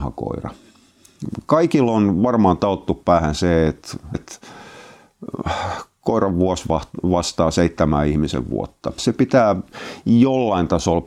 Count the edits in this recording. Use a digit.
2